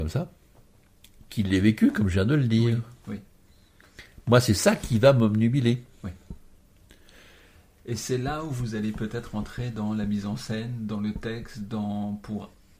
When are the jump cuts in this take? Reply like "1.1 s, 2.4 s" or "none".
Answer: none